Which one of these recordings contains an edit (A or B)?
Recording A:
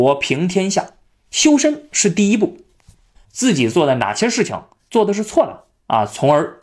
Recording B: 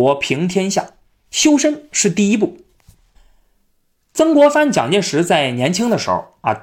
A